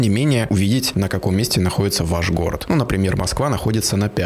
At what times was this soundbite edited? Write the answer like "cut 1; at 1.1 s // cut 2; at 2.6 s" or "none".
none